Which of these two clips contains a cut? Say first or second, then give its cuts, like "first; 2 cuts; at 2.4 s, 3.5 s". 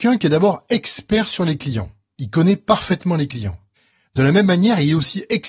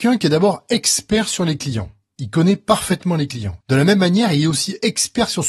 second; 1 cut; at 3.6 s